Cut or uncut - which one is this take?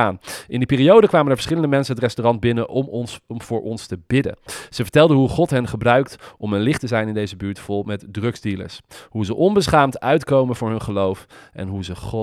uncut